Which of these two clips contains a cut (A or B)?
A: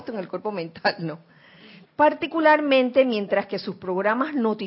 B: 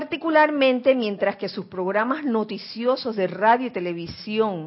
A